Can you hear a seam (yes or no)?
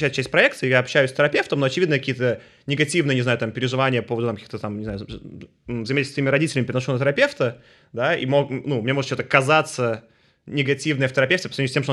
no